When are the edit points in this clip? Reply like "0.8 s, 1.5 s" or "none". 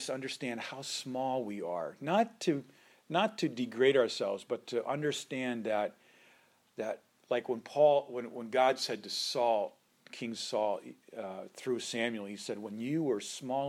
none